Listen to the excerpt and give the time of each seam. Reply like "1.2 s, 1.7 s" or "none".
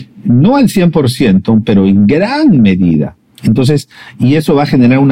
none